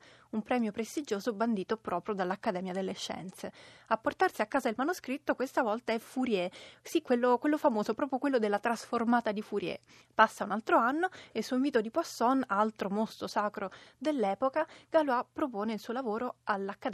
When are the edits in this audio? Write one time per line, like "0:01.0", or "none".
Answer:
0:10.0